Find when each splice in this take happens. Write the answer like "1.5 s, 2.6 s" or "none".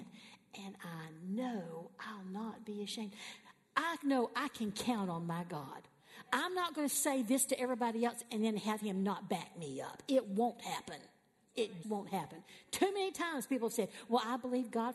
11.8 s